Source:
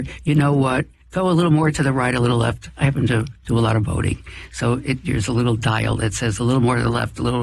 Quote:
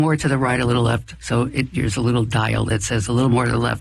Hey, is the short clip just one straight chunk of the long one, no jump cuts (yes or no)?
no